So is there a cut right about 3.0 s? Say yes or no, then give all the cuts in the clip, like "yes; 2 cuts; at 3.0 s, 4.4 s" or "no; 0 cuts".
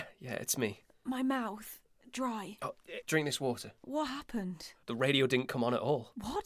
yes; 2 cuts; at 3.0 s, 4.8 s